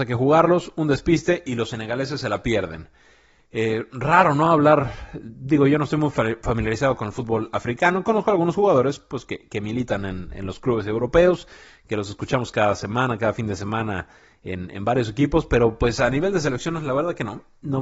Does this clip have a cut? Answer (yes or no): no